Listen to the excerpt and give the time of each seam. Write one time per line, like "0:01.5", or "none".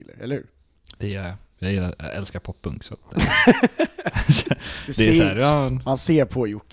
none